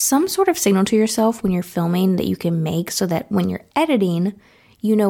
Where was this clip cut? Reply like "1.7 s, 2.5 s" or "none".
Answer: none